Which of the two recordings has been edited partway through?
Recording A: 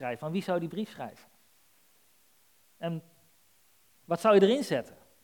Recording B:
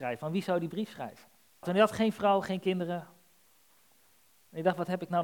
B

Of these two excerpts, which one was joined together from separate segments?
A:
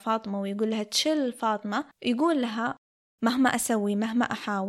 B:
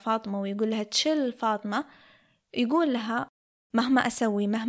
A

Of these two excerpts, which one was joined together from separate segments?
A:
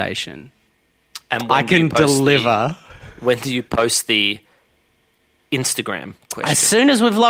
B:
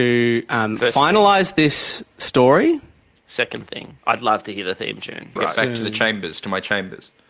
B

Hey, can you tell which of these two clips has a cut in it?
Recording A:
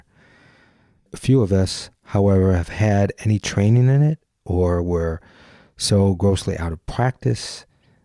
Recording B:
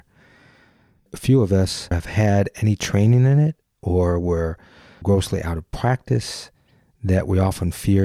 B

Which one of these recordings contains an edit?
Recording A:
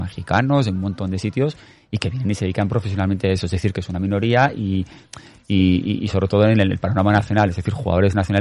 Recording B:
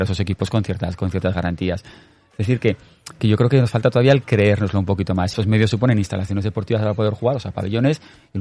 B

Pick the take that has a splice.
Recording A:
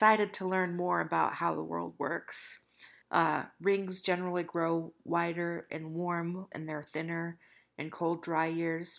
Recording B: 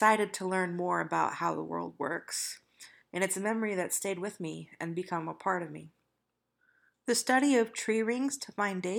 A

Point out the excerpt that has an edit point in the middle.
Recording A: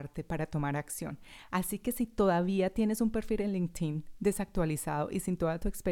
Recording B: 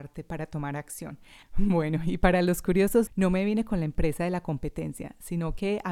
B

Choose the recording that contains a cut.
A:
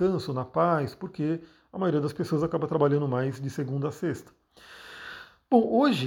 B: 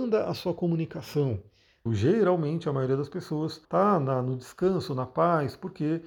B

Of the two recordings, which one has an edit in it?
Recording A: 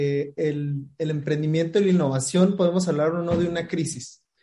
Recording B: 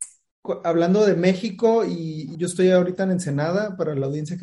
B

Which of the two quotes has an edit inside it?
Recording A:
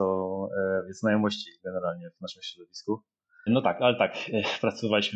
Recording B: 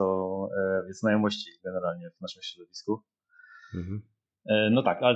A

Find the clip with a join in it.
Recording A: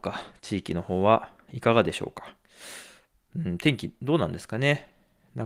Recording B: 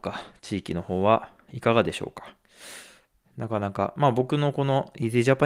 B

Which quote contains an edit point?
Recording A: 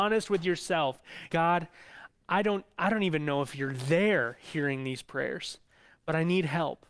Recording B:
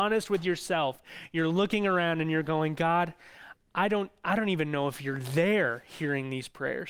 A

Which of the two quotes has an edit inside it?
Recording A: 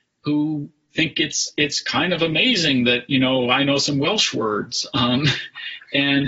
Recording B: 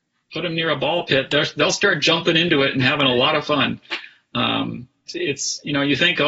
B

